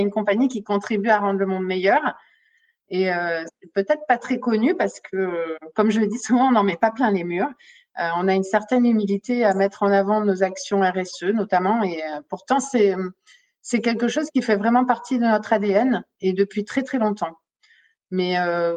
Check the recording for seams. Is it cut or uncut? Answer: uncut